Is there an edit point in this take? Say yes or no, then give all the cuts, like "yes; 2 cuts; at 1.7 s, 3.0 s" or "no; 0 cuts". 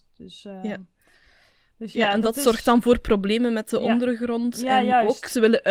no; 0 cuts